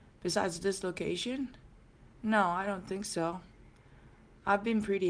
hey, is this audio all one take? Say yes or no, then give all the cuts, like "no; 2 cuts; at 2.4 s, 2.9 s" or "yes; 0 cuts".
yes; 0 cuts